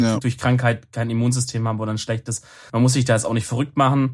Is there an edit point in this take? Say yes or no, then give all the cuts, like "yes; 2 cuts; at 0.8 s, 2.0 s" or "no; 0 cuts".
yes; 1 cut; at 2.7 s